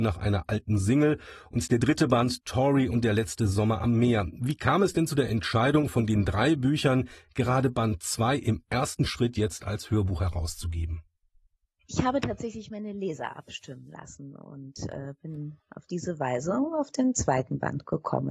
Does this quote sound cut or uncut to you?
uncut